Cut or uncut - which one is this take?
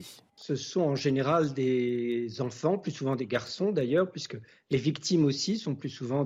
uncut